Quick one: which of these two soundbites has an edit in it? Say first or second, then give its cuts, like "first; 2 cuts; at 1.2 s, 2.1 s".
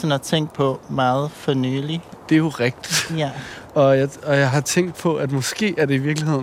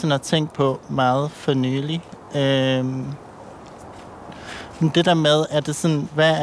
first; 1 cut; at 2.3 s